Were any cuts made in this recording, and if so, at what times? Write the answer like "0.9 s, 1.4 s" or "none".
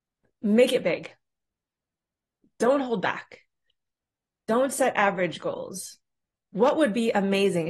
none